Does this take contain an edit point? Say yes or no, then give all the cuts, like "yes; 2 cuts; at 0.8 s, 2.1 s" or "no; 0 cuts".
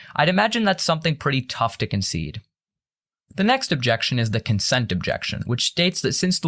yes; 1 cut; at 5.4 s